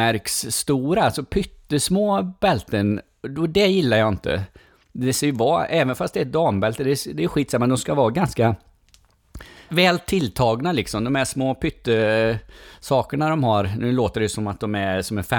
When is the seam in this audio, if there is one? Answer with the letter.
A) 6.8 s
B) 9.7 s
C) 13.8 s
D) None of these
B